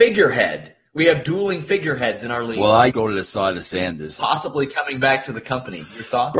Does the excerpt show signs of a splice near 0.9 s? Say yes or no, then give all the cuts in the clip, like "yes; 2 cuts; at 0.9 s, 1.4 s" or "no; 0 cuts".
no; 2 cuts; at 2.9 s, 4.2 s